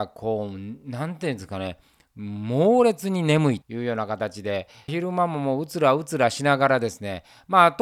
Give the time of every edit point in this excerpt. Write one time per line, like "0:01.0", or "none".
0:03.6
0:04.9